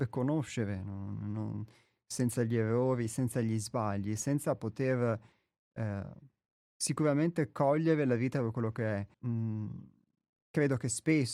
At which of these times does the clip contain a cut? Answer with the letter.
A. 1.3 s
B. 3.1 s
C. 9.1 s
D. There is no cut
C